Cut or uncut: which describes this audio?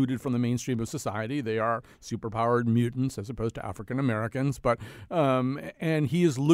uncut